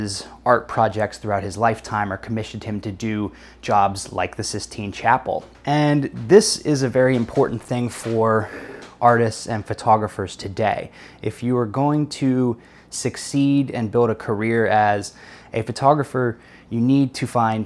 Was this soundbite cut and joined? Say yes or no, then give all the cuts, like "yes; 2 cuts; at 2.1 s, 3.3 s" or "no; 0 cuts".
no; 0 cuts